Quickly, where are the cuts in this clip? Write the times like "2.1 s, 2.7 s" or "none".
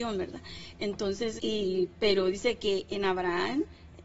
1.4 s

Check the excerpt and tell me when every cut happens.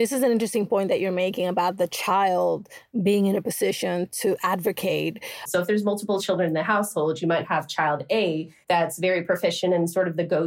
5.5 s, 8.6 s

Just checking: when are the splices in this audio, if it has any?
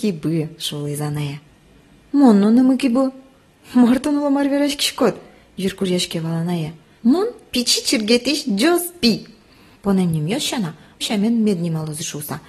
11.0 s

